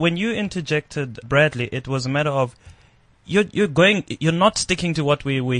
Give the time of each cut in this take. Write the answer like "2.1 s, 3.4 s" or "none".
1.2 s